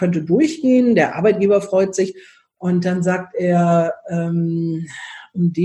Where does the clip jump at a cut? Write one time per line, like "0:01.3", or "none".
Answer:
none